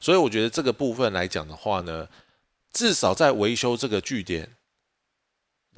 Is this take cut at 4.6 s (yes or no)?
no